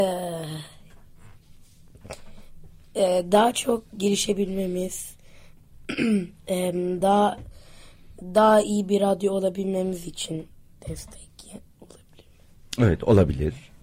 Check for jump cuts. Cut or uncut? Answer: uncut